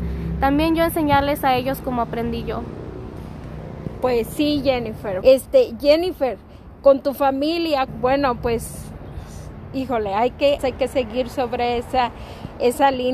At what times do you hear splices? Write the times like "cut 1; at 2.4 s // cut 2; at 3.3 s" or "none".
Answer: cut 1; at 5.2 s // cut 2; at 7.9 s // cut 3; at 10.6 s